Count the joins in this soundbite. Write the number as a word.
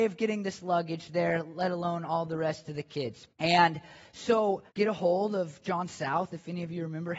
two